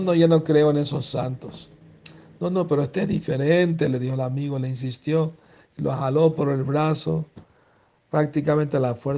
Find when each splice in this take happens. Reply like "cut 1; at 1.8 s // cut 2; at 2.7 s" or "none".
none

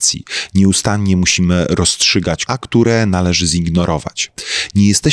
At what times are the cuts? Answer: cut 1; at 2.5 s

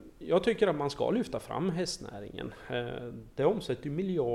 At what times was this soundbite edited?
cut 1; at 3.3 s

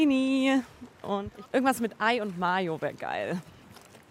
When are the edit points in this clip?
cut 1; at 1.5 s

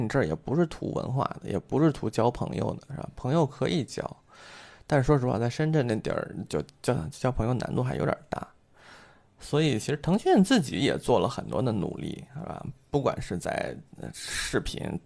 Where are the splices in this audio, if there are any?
none

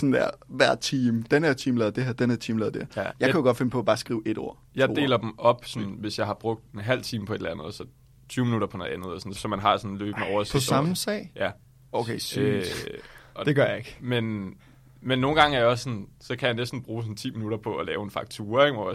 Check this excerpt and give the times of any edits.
cut 1; at 3.1 s // cut 2; at 9.3 s

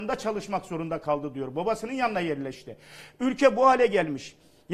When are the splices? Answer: none

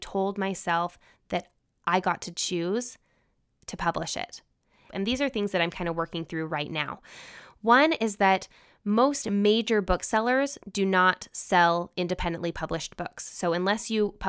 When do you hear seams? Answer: cut 1; at 4.9 s

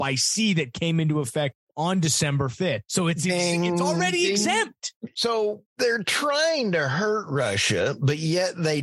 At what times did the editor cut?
cut 1; at 5.1 s

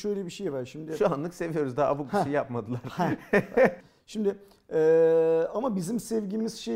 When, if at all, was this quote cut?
cut 1; at 3.8 s

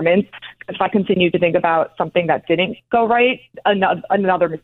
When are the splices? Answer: none

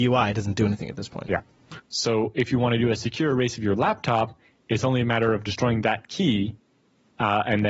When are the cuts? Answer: cut 1; at 1.8 s

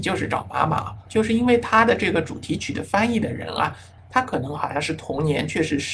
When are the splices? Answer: cut 1; at 1.1 s // cut 2; at 4.0 s

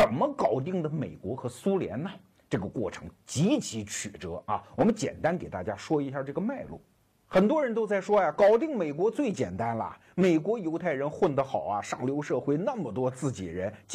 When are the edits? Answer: none

